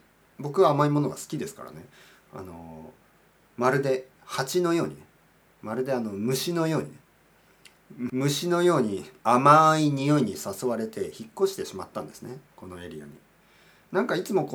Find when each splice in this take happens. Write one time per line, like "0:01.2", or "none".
0:08.1
0:09.2

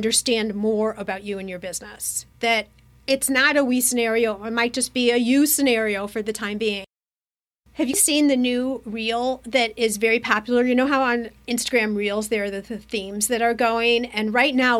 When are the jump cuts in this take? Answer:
none

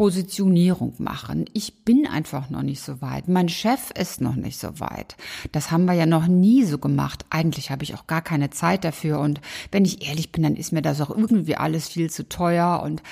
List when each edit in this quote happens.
none

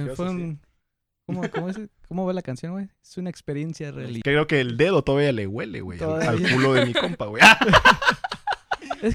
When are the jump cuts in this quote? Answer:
0:04.2

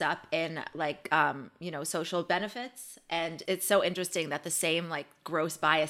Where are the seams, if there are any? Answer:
0:03.5

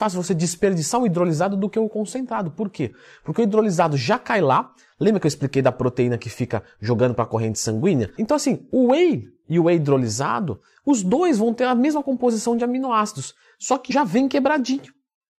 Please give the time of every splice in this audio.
0:08.2
0:13.9

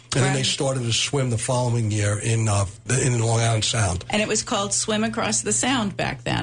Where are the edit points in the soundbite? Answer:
0:02.9

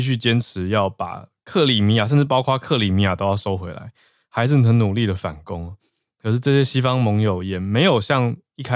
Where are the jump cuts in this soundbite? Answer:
none

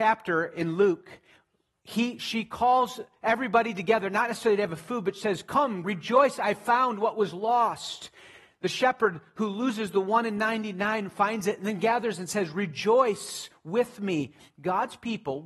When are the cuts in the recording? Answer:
0:05.8

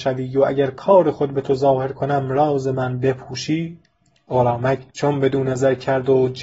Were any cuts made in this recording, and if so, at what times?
0:04.9

